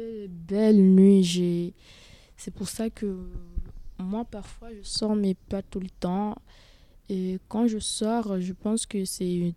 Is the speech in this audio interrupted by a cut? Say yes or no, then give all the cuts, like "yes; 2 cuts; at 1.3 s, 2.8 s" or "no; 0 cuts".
no; 0 cuts